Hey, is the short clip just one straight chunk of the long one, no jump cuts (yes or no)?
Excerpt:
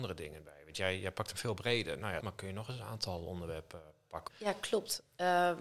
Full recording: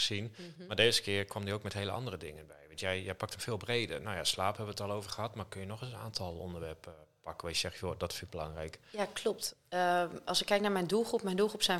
no